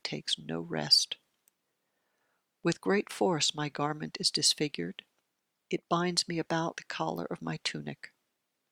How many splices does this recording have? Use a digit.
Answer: 1